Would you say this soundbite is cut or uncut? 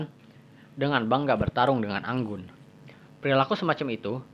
uncut